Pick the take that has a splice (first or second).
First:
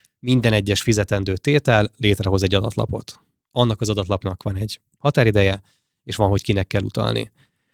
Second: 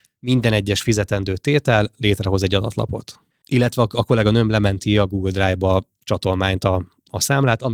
second